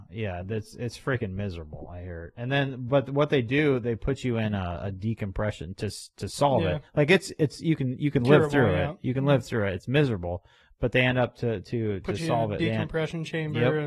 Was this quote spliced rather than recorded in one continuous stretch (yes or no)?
no